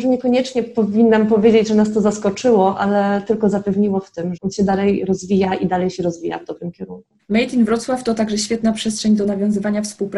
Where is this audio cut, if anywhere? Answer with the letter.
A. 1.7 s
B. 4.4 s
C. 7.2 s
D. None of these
B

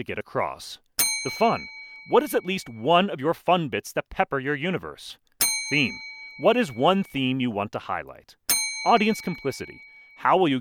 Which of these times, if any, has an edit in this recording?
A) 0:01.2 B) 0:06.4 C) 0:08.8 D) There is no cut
D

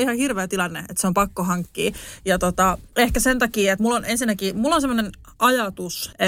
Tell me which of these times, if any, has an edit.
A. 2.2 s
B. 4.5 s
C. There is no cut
C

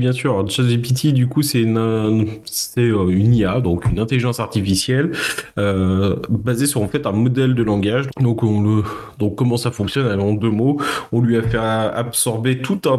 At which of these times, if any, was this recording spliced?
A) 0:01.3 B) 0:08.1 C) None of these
B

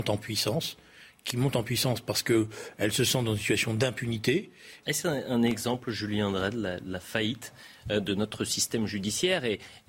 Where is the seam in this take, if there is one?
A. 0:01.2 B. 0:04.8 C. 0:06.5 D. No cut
B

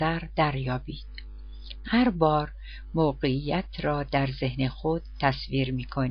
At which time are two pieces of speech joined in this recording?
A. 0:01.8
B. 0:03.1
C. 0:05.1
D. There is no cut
A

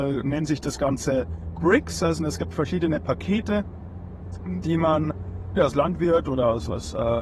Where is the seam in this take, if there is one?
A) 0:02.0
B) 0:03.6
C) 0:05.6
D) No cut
C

